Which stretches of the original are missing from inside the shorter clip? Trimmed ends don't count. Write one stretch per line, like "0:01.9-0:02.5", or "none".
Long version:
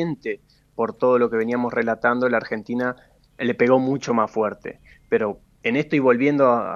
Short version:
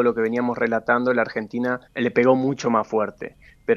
0:03.0-0:03.3